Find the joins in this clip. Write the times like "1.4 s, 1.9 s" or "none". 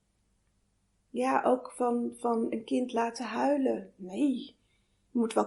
none